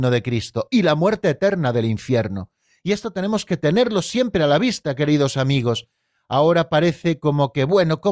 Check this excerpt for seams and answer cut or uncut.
uncut